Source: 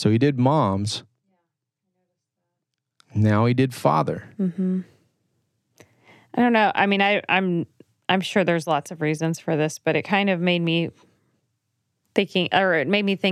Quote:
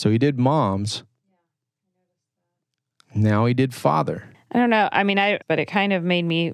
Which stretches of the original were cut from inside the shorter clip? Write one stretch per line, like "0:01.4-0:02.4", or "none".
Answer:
0:04.3-0:06.2
0:07.2-0:09.8

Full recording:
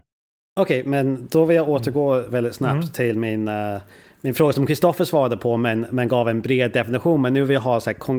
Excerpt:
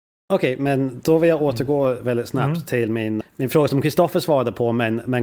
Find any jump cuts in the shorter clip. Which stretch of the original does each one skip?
0:03.5-0:04.1

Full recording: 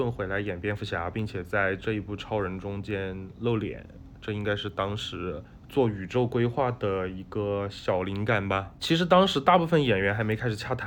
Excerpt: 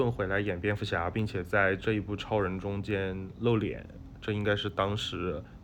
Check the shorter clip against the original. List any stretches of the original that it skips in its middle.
none

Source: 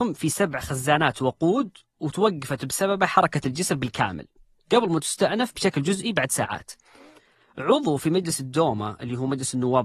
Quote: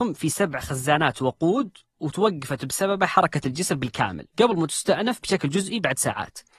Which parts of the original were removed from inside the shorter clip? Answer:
0:04.3-0:04.6

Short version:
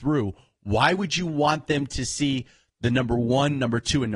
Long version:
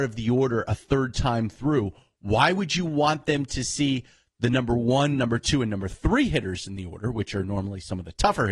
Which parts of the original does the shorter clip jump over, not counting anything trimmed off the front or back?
none

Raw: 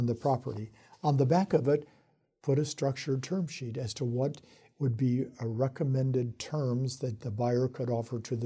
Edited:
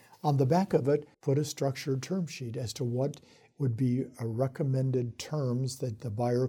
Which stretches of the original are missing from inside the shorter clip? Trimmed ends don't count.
0:01.9-0:02.3

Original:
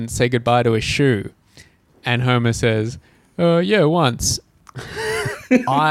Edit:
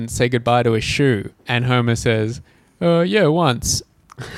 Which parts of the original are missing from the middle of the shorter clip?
0:01.4-0:02.0

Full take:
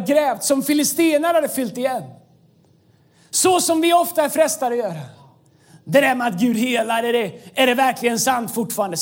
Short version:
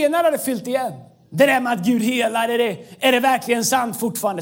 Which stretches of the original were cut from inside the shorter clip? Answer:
0:02.4-0:05.8

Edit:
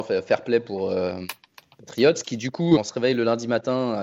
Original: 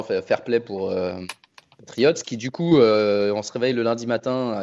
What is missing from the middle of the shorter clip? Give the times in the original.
0:02.8-0:03.3

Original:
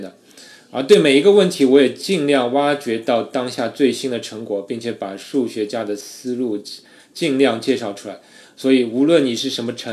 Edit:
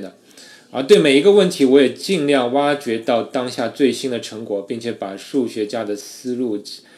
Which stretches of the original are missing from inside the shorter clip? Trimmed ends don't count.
none

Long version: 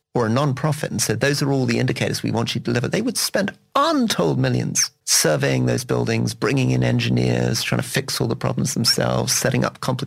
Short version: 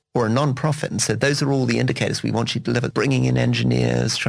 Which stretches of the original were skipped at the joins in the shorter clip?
0:02.9-0:06.4

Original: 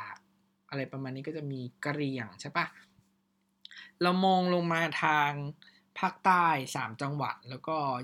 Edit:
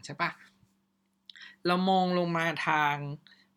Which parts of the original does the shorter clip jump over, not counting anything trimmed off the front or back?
none

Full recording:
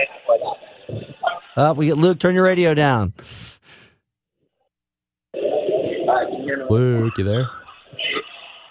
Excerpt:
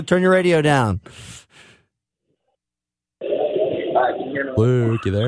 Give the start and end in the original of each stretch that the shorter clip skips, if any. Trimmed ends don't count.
none

